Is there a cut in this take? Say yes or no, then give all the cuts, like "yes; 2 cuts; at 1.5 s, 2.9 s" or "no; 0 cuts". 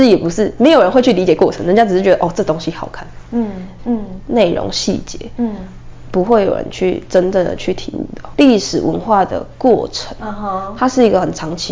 yes; 2 cuts; at 3.8 s, 8.3 s